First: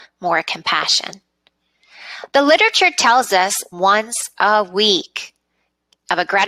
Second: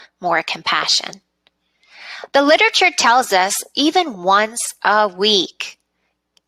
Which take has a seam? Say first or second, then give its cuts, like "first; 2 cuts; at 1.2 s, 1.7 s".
first; 1 cut; at 3.7 s